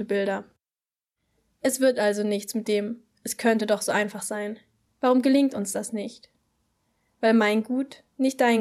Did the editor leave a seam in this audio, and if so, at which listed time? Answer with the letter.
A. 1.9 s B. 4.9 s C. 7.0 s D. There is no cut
B